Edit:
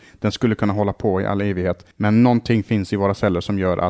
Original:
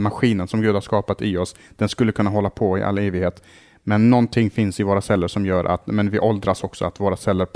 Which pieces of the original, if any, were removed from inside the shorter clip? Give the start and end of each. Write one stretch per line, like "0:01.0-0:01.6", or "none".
0:03.5-0:03.8

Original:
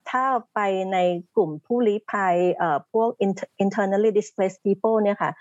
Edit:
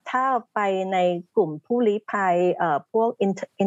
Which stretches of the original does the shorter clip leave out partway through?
none

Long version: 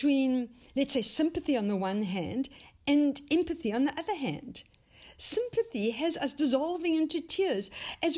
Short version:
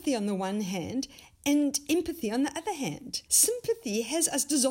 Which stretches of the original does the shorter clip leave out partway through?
0:04.7-0:05.1

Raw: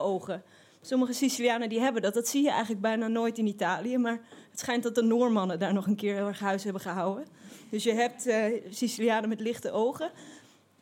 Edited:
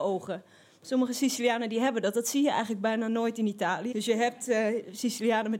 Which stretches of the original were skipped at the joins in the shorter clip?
0:03.9-0:07.7

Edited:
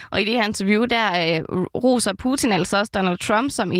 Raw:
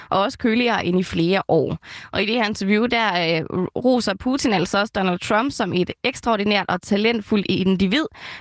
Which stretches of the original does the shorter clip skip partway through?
none

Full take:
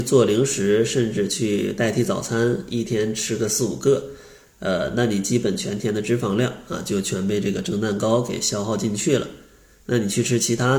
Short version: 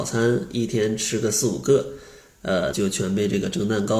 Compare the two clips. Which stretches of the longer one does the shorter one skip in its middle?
0:04.9-0:06.8

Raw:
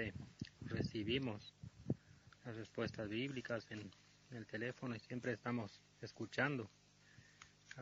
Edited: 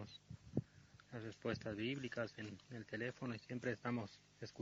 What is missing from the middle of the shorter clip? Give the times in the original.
0:04.0-0:04.2

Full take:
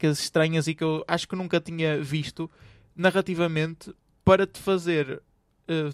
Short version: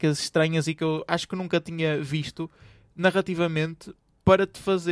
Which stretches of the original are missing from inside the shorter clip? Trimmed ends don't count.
none

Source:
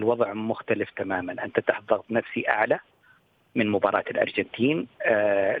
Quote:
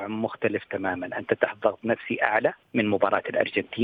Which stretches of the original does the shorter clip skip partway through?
0:02.9-0:03.4

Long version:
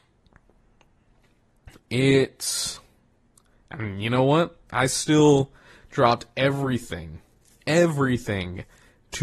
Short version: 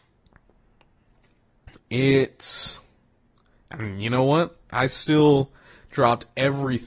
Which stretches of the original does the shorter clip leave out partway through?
none

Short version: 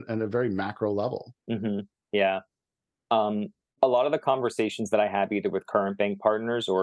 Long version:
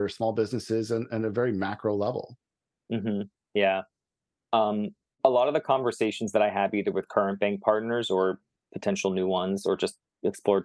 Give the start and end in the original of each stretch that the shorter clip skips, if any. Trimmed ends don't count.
0:02.4-0:02.8

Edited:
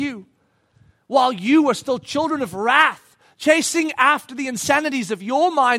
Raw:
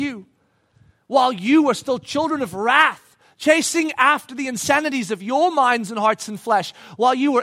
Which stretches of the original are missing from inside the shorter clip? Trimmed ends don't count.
none

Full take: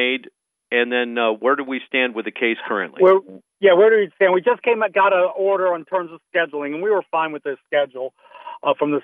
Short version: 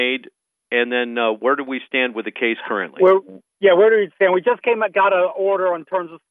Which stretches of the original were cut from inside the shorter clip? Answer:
none

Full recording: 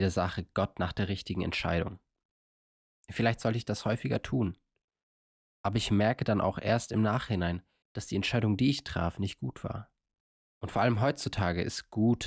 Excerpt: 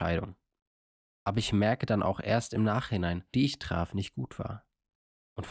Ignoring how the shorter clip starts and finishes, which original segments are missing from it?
0:02.7-0:05.4
0:07.7-0:08.6

